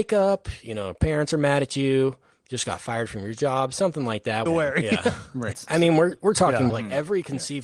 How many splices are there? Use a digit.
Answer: 3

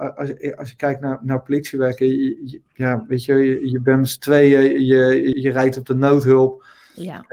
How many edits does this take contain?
1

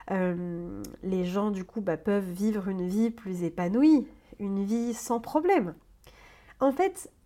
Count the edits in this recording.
0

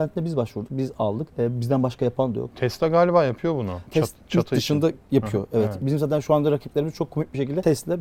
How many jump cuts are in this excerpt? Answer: 1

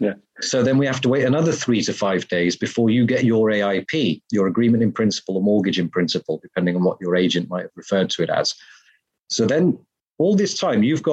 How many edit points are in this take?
0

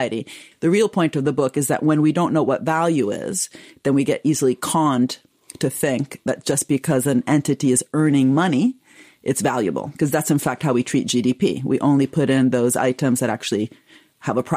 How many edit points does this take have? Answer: 0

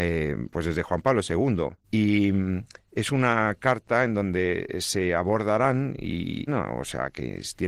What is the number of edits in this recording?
2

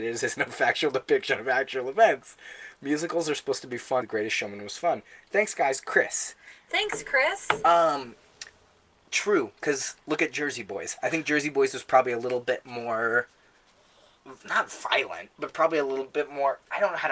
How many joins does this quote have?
1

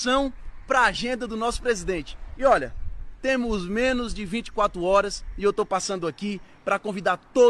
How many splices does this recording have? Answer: 1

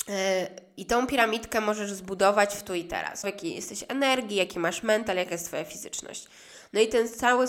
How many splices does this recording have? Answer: 1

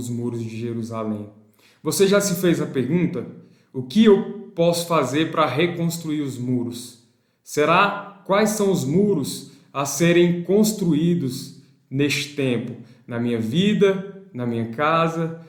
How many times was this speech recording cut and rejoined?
0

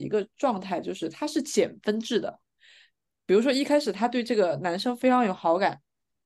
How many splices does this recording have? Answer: 0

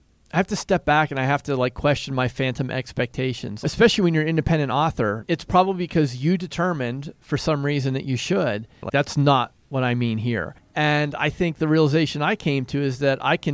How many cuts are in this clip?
3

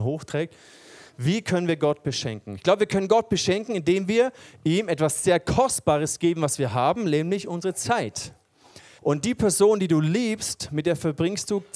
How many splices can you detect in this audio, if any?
1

